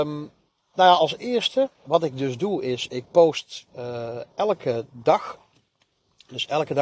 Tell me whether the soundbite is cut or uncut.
cut